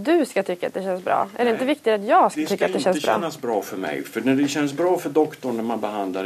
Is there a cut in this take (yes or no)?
no